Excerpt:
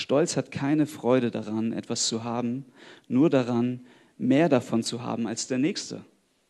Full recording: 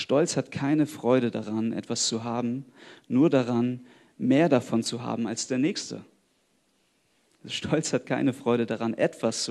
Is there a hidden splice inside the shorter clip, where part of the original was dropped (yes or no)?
no